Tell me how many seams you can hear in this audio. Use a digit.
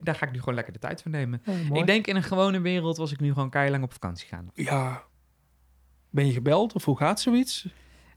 1